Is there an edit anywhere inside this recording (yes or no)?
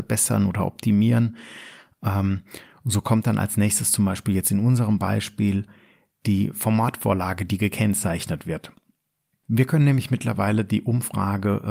no